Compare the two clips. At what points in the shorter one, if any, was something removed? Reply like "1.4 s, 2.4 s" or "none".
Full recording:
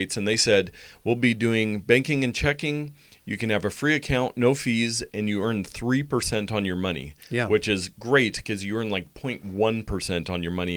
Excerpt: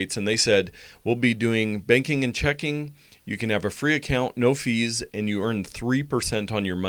none